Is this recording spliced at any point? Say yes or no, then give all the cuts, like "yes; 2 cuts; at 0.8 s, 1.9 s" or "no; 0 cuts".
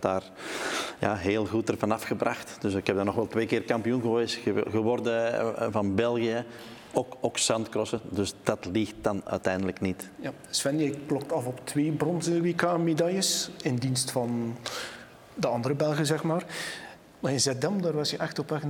no; 0 cuts